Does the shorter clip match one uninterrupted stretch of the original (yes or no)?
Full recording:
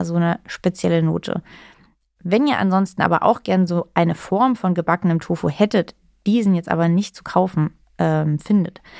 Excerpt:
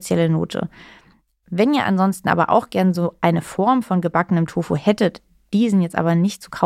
yes